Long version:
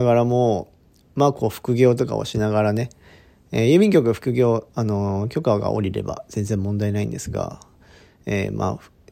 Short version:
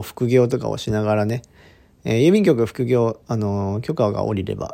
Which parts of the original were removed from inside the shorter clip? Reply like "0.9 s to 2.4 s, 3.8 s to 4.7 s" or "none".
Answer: none